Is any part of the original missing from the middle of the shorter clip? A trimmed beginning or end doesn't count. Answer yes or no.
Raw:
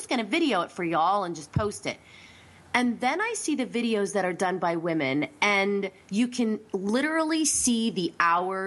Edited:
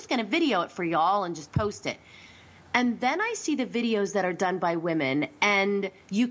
no